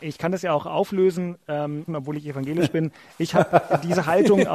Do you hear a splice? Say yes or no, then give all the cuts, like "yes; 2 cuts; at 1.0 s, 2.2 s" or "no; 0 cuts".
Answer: yes; 1 cut; at 1.9 s